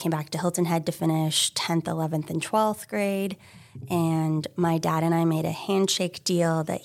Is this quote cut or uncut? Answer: uncut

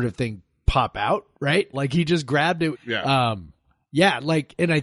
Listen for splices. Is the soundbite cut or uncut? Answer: cut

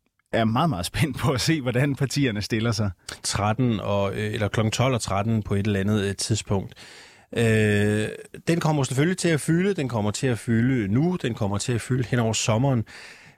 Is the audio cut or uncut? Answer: cut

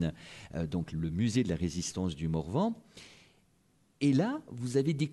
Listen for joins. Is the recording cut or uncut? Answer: uncut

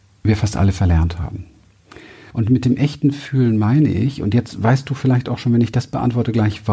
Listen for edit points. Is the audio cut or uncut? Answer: cut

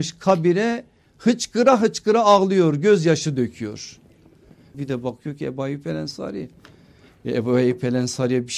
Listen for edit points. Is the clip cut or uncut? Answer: cut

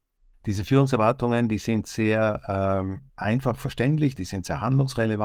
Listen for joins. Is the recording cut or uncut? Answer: cut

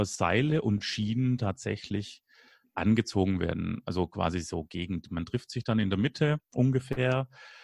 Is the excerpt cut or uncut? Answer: uncut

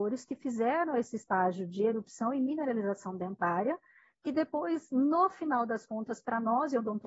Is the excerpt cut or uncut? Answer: uncut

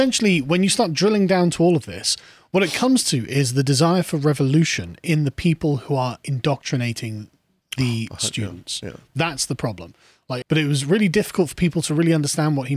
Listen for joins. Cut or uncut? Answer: cut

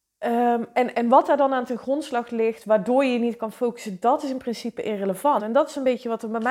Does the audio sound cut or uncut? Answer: cut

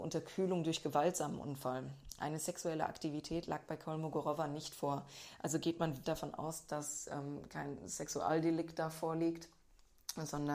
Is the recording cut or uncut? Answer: cut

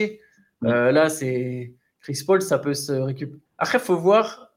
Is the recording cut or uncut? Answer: cut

